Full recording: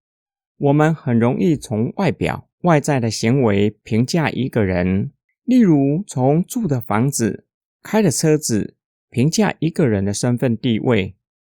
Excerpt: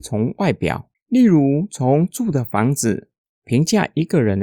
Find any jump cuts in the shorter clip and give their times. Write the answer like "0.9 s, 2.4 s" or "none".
0.9 s, 3.3 s